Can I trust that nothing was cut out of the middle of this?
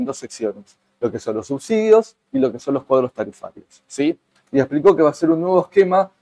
no; 1 cut; at 4.4 s

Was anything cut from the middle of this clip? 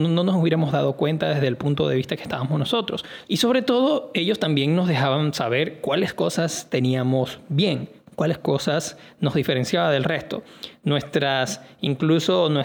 yes; 1 cut; at 3.2 s

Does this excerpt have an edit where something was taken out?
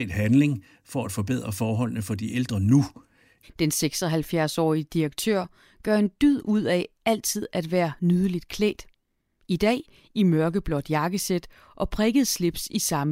yes; 1 cut; at 3.4 s

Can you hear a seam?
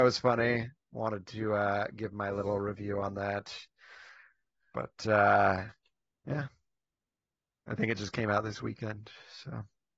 no; 0 cuts

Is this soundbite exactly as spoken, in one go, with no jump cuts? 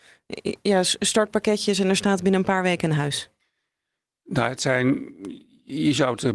yes; 0 cuts

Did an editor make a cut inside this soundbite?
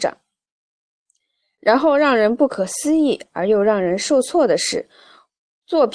no; 0 cuts

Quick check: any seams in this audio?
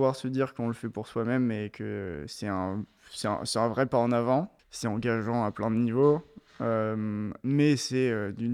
yes; 1 cut; at 4.6 s

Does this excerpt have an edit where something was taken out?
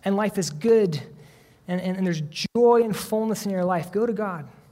no; 0 cuts

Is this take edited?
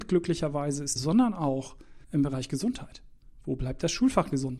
yes; 2 cuts; at 1.0 s, 2.0 s

